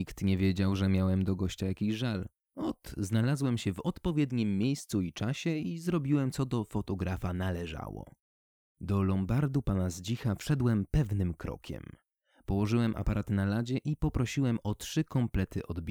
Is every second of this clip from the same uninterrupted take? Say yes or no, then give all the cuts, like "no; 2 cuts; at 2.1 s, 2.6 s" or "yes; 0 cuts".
yes; 0 cuts